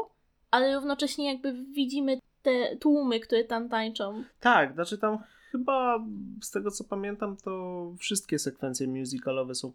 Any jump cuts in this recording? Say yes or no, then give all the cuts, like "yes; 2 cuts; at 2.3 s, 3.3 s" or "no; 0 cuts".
no; 0 cuts